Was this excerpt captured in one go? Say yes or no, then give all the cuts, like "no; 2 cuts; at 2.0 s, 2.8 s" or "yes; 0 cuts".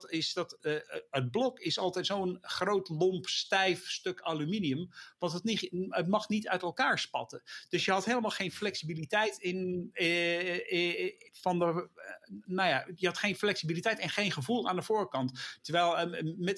no; 2 cuts; at 12.4 s, 15.6 s